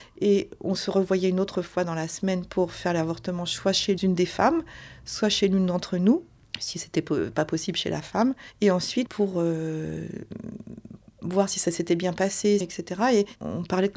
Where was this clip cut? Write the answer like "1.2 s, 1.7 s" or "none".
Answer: 9.1 s, 12.6 s